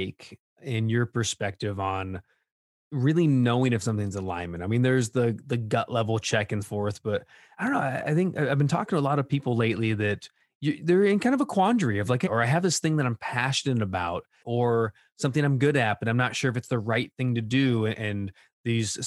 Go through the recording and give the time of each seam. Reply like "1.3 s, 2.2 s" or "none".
6.6 s, 12.3 s, 14.4 s